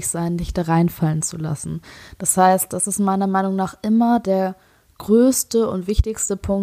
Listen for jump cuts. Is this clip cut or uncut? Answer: uncut